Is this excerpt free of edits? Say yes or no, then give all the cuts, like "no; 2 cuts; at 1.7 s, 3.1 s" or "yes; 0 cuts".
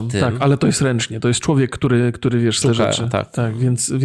no; 1 cut; at 2.6 s